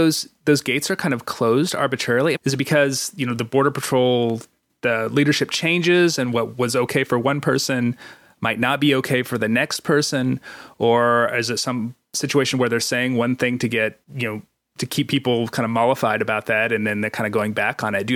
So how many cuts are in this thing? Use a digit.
2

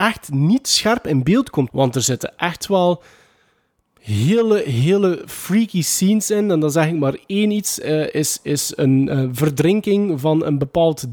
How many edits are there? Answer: 1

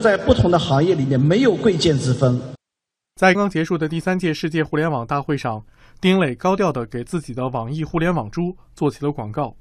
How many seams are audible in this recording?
1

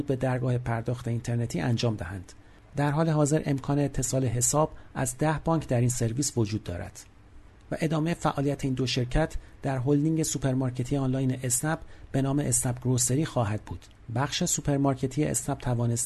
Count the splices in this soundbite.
1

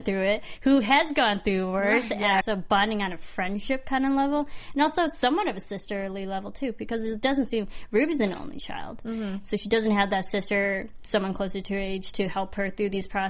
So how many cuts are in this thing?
1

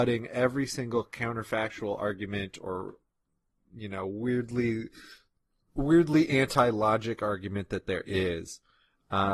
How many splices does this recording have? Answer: 0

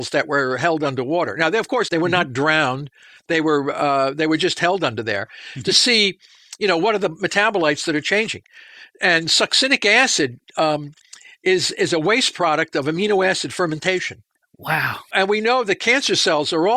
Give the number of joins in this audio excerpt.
1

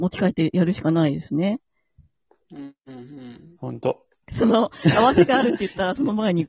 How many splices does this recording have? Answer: 2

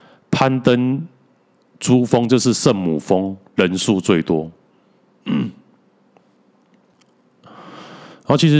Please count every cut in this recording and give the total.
0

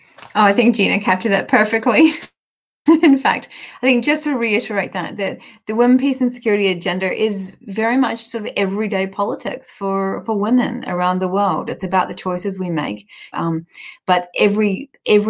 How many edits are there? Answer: 1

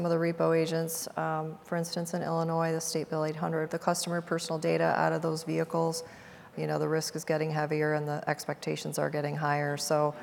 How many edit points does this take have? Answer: 2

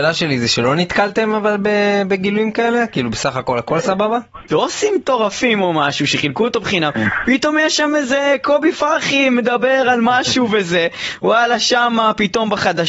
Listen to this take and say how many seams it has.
1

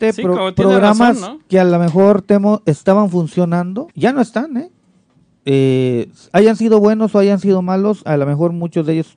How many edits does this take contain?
2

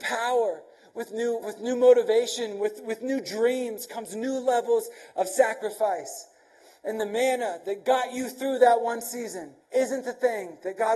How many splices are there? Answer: 2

